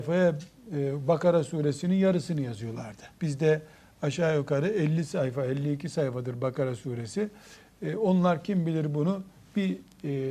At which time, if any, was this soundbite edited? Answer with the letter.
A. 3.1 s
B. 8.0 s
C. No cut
A